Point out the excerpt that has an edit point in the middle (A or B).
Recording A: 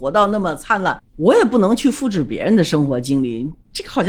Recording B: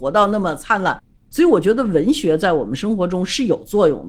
A